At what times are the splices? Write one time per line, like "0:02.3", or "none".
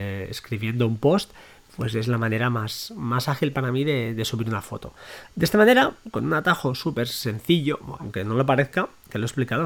0:05.3
0:08.0